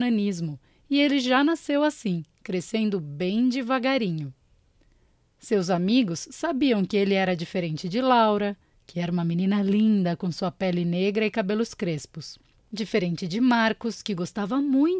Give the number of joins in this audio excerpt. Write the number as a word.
zero